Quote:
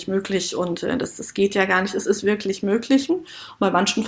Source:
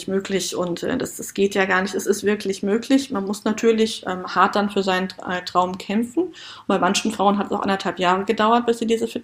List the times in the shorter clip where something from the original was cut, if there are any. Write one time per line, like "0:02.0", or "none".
0:03.1